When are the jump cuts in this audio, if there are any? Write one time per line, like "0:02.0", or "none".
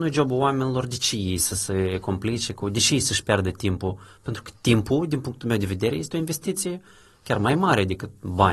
none